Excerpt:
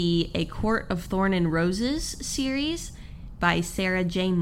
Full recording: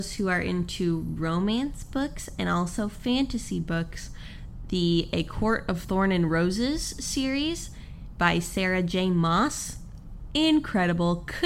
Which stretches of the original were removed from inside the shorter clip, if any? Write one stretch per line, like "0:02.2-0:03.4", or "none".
none